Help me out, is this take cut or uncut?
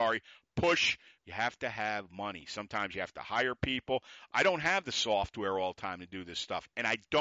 cut